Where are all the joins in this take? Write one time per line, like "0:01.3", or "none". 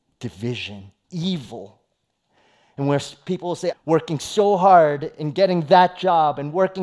0:01.0
0:03.7